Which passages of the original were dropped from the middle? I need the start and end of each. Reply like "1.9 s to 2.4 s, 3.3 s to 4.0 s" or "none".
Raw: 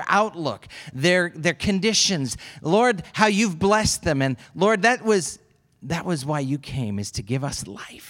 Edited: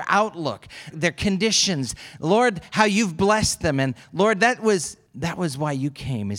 0.9 s to 1.3 s, 5.5 s to 5.7 s